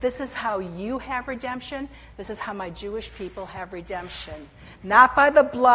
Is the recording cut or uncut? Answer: uncut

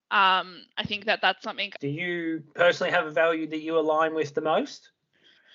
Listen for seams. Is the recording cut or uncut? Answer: cut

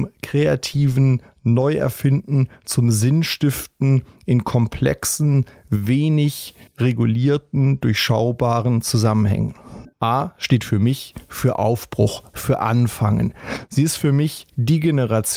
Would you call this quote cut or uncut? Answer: cut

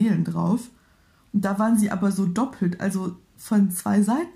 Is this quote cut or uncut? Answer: uncut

